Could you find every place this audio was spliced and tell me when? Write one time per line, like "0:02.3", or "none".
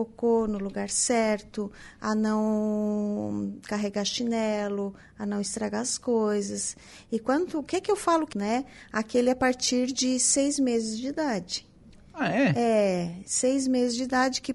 0:08.3